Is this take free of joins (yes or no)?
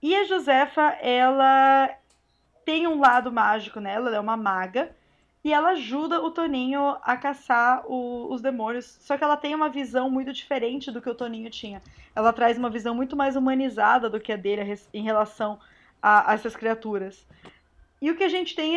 yes